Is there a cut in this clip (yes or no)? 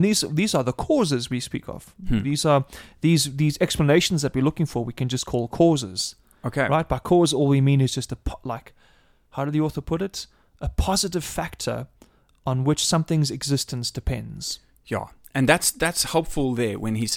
no